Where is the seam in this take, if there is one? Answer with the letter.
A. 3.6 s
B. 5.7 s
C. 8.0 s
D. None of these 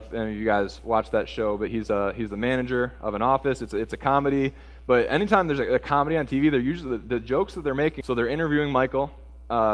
C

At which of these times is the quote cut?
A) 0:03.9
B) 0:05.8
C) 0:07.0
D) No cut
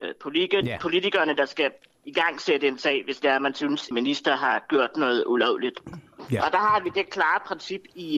A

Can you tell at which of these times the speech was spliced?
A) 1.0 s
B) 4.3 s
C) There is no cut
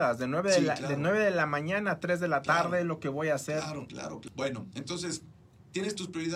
B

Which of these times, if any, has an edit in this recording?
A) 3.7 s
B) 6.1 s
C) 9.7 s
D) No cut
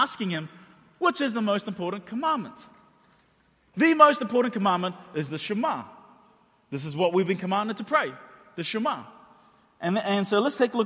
A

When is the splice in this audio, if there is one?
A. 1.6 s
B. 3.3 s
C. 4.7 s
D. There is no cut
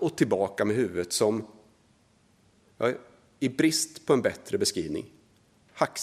D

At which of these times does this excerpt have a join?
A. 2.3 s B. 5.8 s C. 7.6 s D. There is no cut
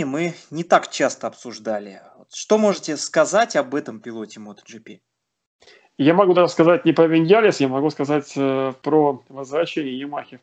D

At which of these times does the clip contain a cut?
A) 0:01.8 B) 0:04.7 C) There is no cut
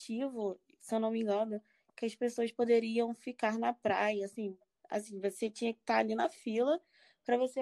C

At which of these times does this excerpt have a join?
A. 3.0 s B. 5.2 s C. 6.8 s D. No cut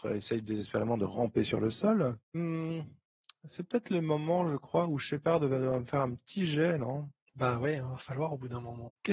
D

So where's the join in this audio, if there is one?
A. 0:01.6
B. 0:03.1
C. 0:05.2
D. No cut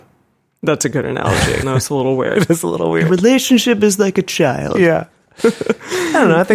A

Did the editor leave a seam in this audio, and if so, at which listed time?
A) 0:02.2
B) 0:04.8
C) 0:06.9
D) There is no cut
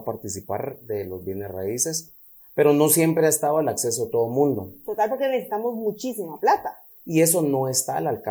C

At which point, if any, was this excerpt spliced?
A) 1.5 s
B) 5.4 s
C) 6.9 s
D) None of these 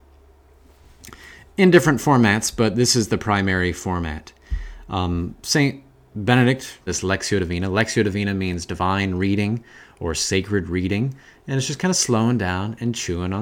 C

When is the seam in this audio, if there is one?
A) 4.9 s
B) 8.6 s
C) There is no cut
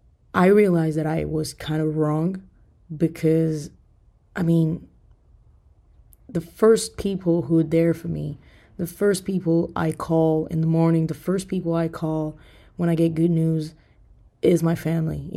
C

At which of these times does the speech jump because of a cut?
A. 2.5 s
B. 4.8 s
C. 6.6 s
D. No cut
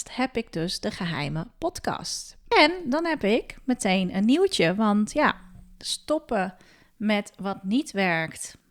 A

